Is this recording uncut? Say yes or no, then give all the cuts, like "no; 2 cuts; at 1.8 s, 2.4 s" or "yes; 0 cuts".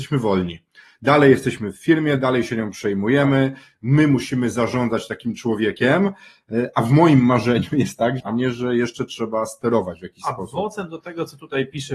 no; 1 cut; at 8.2 s